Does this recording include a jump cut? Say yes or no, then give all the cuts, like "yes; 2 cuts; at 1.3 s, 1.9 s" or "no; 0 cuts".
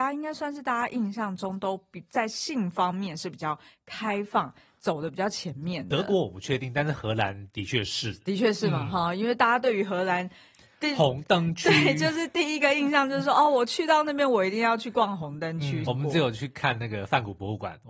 yes; 1 cut; at 15.8 s